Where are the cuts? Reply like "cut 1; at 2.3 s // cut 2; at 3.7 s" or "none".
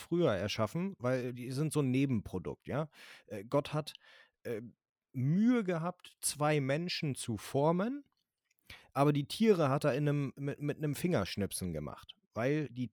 cut 1; at 1.3 s